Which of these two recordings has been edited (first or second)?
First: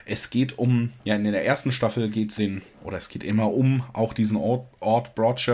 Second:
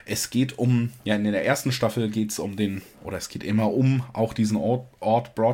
first